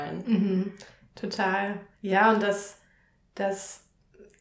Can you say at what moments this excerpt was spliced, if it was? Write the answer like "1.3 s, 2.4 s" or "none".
1.9 s